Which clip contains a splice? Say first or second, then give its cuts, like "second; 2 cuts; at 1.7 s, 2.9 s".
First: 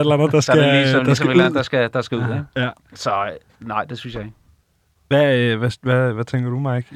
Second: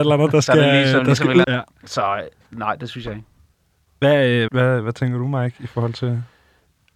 second; 2 cuts; at 1.4 s, 4.5 s